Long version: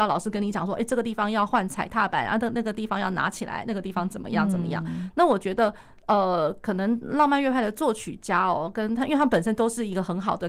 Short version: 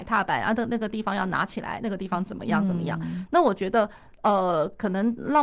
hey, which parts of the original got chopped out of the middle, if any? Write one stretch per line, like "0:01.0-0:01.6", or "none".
none

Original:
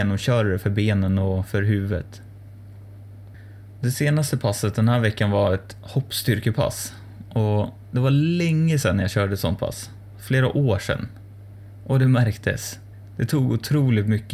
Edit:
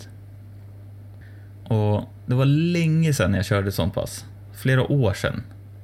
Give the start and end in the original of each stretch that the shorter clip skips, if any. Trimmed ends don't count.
0:03.7-0:07.3

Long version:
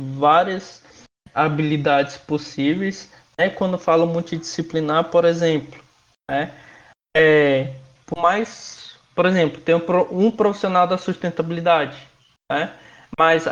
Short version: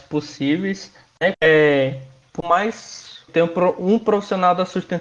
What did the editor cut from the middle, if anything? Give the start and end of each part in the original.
0:03.5-0:07.1
0:09.0-0:09.6

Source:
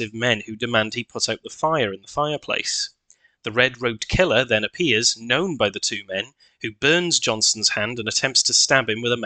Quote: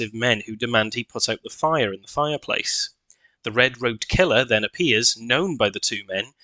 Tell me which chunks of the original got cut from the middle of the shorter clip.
none

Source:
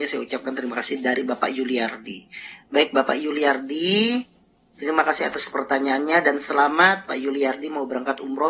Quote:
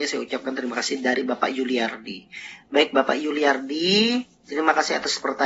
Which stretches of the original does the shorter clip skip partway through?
0:04.3-0:04.6

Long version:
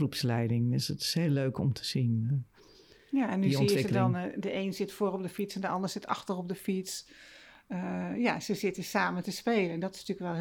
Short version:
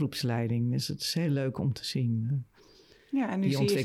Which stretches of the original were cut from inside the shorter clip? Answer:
none

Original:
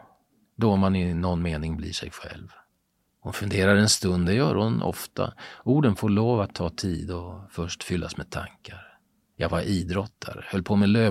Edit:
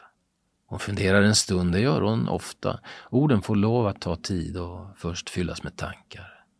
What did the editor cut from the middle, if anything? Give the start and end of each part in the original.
none

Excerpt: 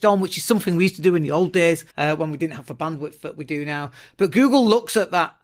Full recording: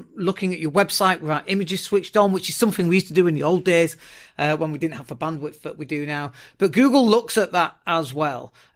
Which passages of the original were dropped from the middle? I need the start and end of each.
0:04.0-0:04.3

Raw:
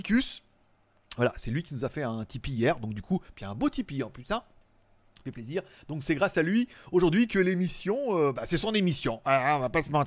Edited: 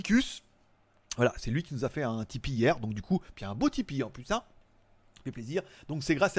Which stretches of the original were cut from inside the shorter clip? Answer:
none

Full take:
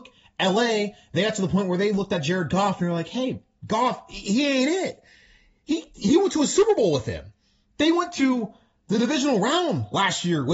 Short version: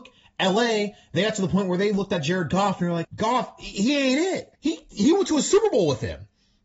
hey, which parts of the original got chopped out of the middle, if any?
0:03.0-0:03.5
0:05.1-0:05.6

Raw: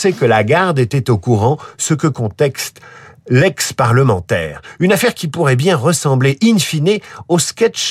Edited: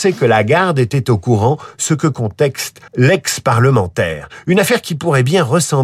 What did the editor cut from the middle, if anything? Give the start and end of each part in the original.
0:02.9-0:03.2

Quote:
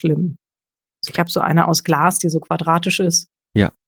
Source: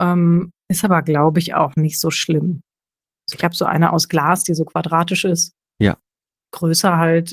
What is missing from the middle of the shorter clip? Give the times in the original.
none

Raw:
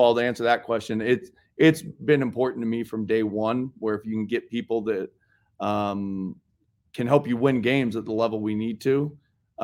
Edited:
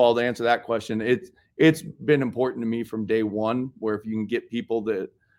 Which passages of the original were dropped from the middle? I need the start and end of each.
none

